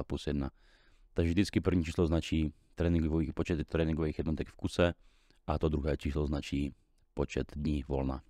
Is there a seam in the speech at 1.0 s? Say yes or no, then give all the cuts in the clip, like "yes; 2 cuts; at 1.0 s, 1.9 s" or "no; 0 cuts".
no; 0 cuts